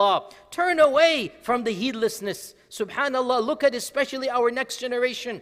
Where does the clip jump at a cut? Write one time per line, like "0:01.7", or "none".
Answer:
none